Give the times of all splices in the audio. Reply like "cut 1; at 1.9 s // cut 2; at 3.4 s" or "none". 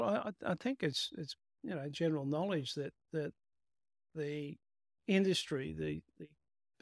none